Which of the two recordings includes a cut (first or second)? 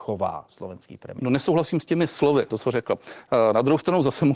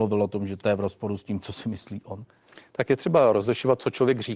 first